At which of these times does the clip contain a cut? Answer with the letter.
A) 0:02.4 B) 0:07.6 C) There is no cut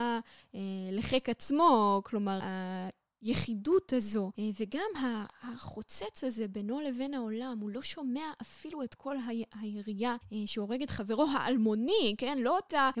A